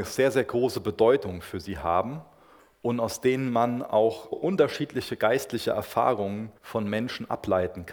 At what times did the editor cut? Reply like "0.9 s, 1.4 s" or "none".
4.3 s, 6.6 s